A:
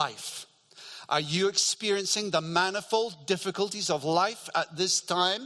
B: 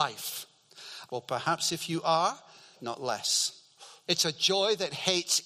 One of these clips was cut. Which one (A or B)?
B